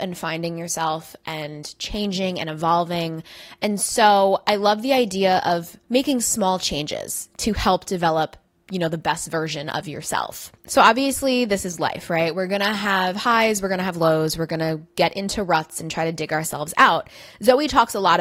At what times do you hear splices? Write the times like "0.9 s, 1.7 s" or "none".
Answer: none